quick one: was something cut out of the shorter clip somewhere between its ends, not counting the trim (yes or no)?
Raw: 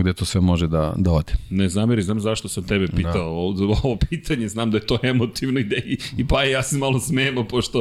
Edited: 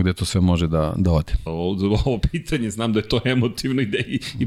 yes